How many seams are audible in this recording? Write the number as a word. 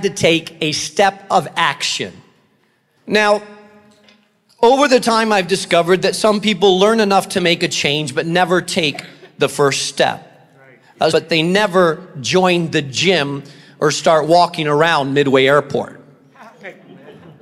two